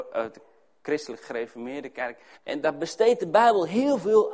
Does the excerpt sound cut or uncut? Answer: cut